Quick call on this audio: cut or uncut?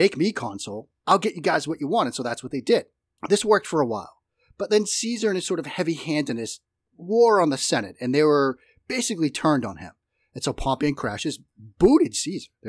uncut